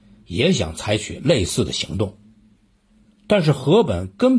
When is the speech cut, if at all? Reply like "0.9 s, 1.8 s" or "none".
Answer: none

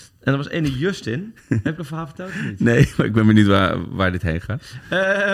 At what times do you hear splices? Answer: none

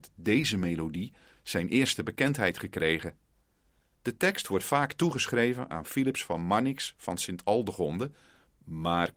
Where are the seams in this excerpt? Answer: 3.9 s

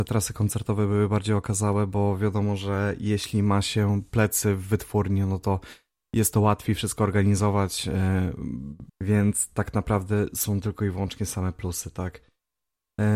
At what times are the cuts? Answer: 8.9 s

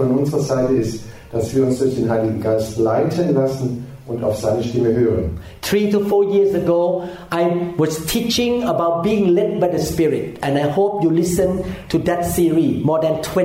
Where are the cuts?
none

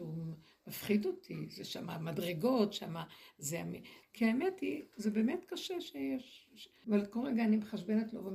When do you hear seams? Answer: 4.0 s, 6.8 s

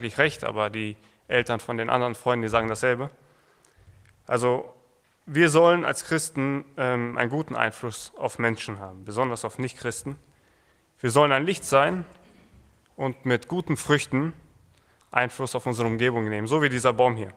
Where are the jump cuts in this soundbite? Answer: none

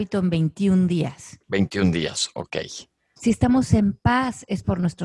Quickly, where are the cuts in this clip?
3.2 s

